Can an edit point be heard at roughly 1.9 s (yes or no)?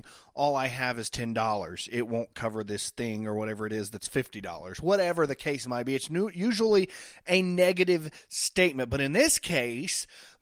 no